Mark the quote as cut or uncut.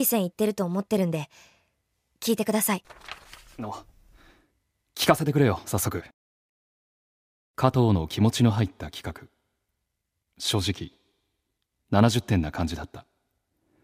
uncut